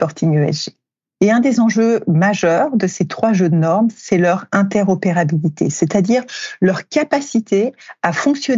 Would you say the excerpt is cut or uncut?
uncut